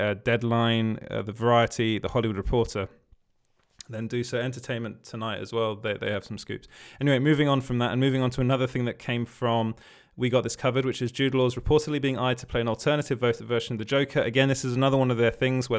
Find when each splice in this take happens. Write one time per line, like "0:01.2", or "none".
none